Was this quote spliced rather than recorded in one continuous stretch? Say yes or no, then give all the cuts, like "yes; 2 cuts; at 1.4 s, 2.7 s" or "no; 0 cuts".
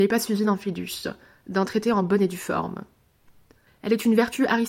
yes; 1 cut; at 3.7 s